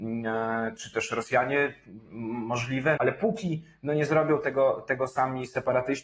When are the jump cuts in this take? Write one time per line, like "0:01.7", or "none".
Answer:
0:03.0